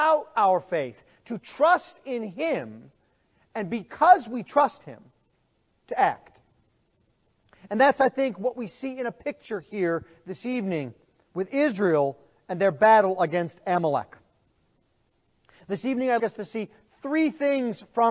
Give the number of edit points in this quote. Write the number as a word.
one